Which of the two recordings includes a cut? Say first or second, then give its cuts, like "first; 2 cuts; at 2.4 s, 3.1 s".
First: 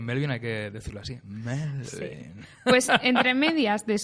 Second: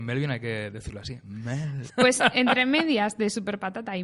second; 1 cut; at 1.9 s